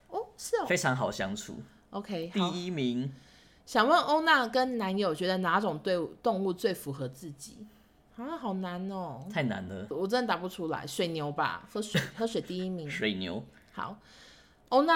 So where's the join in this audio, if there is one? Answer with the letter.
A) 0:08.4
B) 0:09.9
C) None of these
B